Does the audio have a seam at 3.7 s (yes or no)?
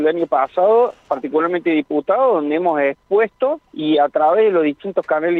yes